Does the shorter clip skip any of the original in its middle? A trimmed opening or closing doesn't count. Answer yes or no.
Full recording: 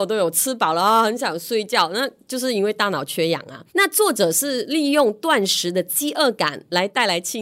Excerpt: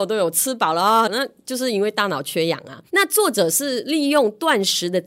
yes